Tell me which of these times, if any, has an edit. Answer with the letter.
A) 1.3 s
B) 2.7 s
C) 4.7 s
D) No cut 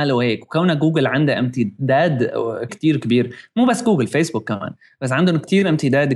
B